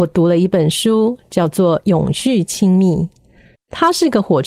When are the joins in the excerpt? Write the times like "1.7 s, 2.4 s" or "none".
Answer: 3.6 s